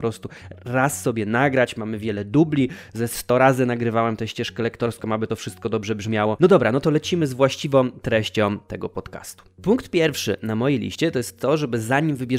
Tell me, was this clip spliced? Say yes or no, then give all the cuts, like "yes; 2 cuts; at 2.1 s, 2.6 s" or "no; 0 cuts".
yes; 1 cut; at 6.4 s